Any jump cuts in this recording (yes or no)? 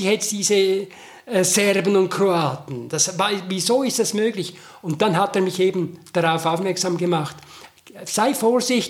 no